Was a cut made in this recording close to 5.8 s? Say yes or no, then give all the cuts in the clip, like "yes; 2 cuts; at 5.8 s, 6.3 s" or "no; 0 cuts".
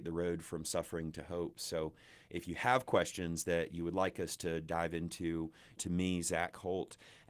yes; 1 cut; at 5.8 s